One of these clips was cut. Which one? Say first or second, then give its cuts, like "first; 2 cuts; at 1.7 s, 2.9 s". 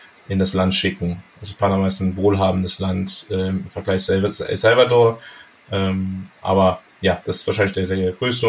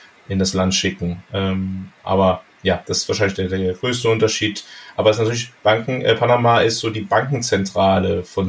second; 1 cut; at 1.2 s